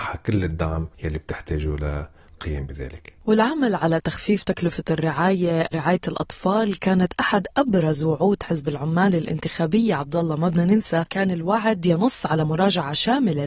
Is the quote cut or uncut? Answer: uncut